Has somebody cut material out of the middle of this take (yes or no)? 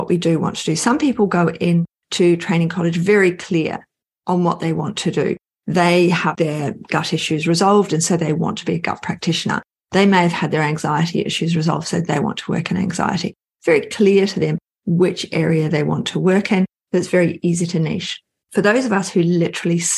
no